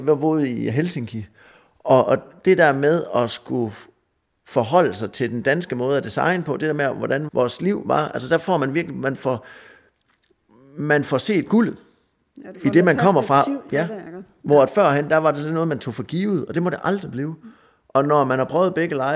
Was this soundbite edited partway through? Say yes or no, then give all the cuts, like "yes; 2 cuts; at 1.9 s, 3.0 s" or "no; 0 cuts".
yes; 1 cut; at 7.3 s